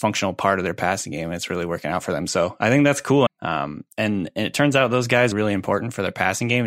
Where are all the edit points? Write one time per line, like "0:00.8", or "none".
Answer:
0:03.3
0:05.3